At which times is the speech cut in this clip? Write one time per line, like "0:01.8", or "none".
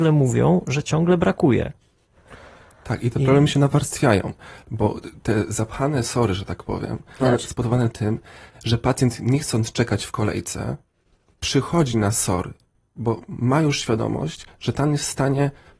0:07.2